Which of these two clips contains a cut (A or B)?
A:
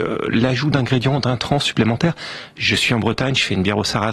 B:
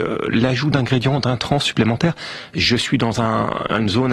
B